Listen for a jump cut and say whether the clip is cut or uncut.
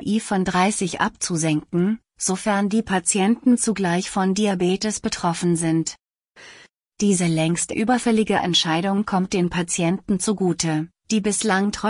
uncut